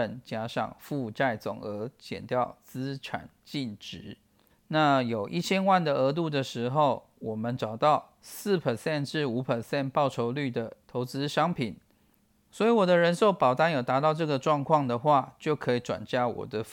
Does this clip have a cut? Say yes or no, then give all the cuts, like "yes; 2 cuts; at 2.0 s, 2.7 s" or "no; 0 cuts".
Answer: yes; 2 cuts; at 4.5 s, 12.3 s